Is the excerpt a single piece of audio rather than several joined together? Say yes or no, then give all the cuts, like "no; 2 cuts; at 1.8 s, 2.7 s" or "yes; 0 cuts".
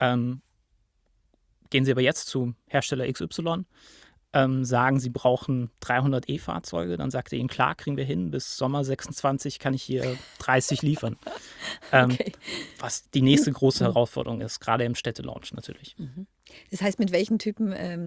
yes; 0 cuts